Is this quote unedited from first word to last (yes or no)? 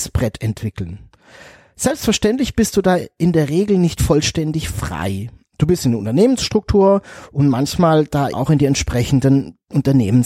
no